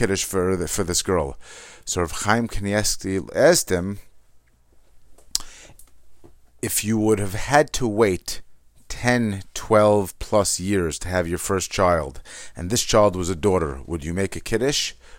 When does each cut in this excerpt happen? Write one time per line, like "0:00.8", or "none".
none